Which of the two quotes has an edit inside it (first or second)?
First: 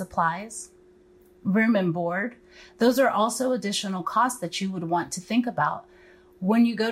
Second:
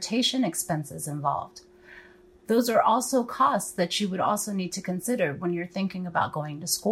second